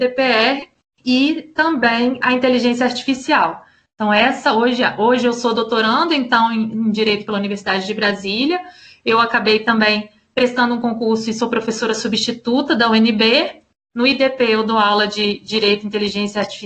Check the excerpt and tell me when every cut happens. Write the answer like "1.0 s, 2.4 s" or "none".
none